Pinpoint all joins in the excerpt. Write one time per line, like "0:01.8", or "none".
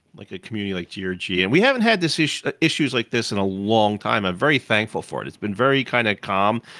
none